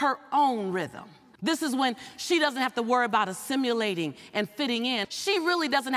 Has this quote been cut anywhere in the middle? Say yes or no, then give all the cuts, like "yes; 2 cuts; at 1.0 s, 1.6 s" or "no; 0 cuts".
yes; 2 cuts; at 1.4 s, 5.0 s